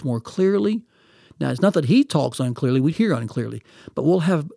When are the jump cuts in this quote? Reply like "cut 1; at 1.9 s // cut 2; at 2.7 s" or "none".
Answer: cut 1; at 2.9 s